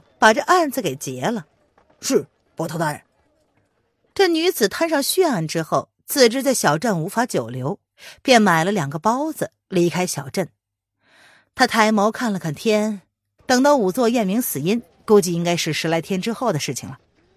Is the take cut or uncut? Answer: cut